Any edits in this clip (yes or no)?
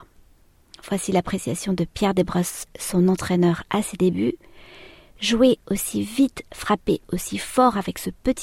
no